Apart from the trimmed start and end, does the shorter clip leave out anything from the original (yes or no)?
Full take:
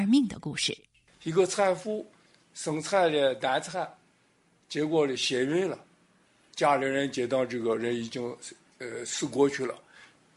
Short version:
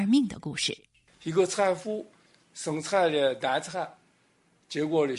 no